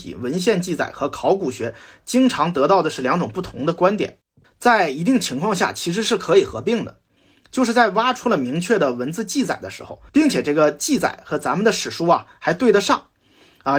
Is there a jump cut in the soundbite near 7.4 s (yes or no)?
no